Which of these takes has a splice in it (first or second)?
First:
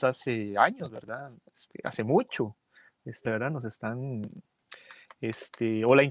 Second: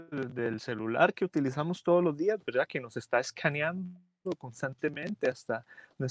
first